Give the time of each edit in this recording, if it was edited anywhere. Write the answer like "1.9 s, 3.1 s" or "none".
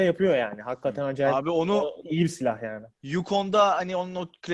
2.9 s